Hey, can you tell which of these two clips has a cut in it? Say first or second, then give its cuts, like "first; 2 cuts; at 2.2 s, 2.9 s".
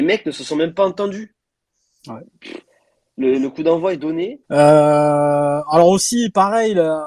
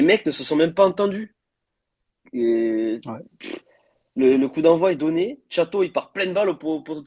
first; 2 cuts; at 2.0 s, 4.4 s